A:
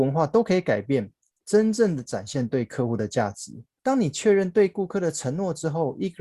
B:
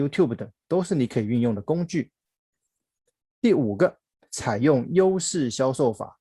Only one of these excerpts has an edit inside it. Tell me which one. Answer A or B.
A